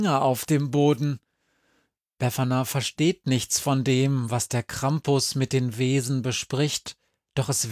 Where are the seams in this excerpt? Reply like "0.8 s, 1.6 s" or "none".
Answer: none